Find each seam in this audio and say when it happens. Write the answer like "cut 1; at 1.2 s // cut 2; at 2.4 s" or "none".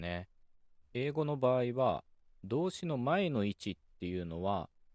cut 1; at 0.9 s